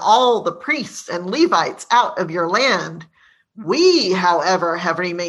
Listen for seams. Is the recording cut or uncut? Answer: uncut